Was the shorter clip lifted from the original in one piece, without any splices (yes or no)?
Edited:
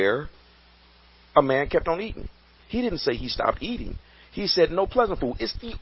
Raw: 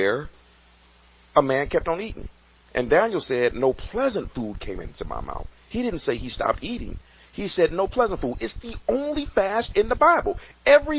no